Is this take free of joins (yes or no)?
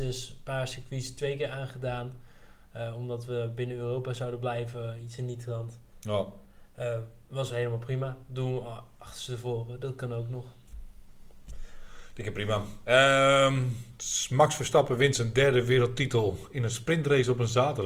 yes